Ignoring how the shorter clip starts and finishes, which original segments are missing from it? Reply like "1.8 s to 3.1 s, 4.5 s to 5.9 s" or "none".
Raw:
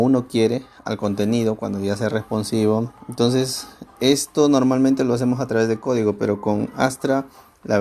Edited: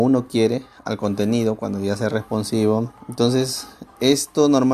none